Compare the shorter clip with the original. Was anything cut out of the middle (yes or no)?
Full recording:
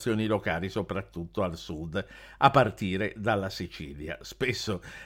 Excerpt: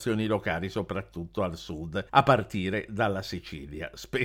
yes